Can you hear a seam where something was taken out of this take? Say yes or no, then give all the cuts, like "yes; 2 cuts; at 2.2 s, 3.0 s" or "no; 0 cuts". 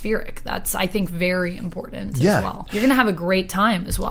yes; 1 cut; at 2.7 s